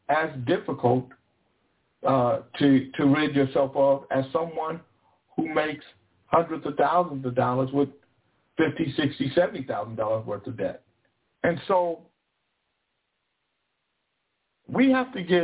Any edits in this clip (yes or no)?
yes